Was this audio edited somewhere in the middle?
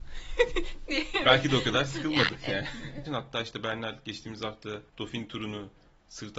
yes; 2 cuts; at 3.1 s, 4.9 s

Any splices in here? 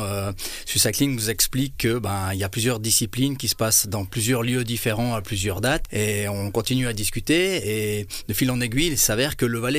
yes; 1 cut; at 5.9 s

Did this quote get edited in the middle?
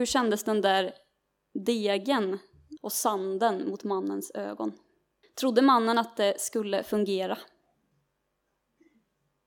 yes; 2 cuts; at 2.8 s, 5.2 s

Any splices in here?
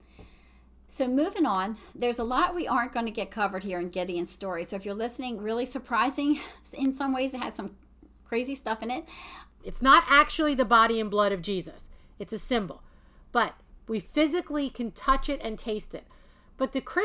yes; 2 cuts; at 5.4 s, 9.6 s

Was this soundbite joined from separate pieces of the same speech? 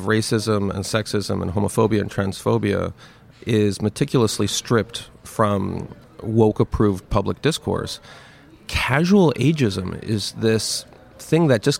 no; 0 cuts

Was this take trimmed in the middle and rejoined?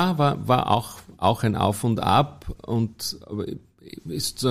no; 0 cuts

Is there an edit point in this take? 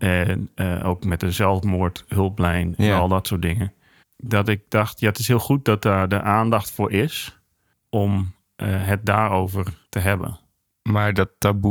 yes; 2 cuts; at 7.7 s, 9.8 s

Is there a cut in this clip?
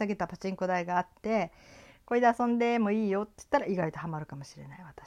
no; 0 cuts

